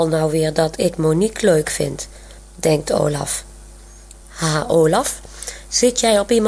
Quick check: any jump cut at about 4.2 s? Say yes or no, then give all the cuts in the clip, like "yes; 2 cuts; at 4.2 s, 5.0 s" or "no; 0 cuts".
yes; 1 cut; at 4.2 s